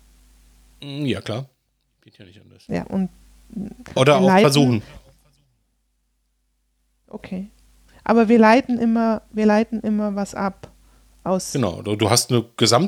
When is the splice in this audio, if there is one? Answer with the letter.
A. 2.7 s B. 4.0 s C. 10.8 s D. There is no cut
B